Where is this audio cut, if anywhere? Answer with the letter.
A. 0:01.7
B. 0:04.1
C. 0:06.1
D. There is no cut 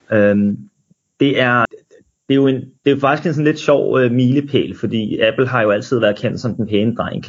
A